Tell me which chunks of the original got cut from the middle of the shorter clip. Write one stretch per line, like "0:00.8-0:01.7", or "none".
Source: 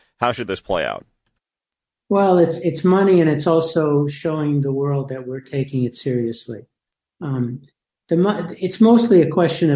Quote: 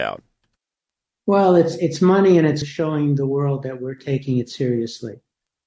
0:03.4-0:04.1